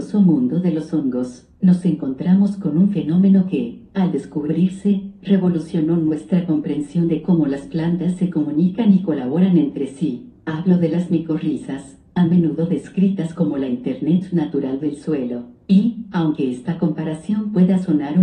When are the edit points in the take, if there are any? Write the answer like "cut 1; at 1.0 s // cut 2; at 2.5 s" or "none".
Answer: none